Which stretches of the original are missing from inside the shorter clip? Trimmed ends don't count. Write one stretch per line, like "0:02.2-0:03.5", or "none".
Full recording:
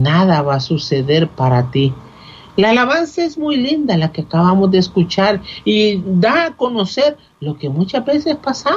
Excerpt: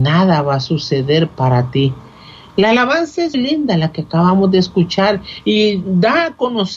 0:03.3-0:03.5